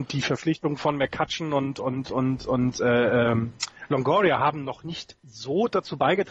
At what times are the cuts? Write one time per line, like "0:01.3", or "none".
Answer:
0:05.2